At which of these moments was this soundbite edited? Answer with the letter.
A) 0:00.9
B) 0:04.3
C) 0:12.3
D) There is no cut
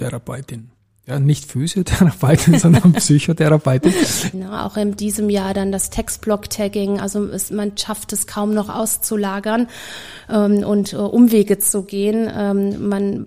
B